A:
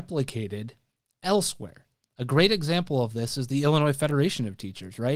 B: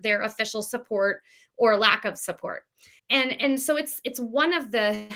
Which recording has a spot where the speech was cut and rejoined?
B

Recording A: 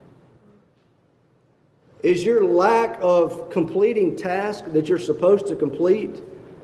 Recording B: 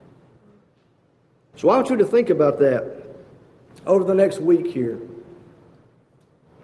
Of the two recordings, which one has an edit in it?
B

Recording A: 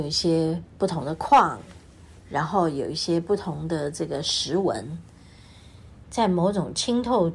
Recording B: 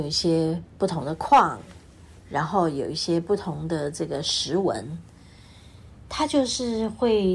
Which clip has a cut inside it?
A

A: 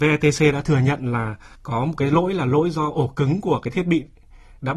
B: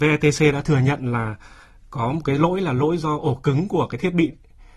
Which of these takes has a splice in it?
A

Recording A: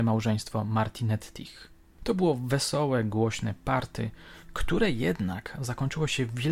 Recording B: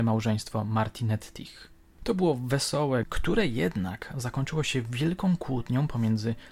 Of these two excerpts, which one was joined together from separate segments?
B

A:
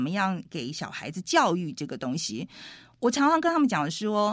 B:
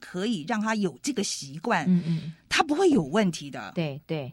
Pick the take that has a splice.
B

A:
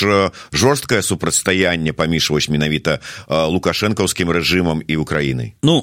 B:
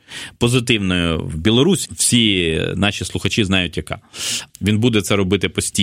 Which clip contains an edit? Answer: B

